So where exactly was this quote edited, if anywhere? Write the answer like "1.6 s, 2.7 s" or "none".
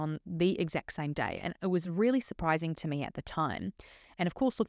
none